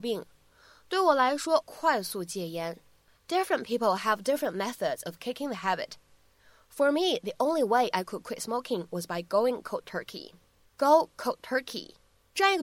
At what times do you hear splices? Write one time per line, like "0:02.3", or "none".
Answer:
0:01.6
0:10.6